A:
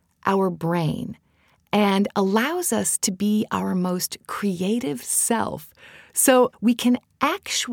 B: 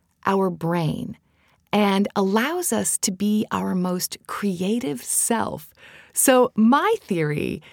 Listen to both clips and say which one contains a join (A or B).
A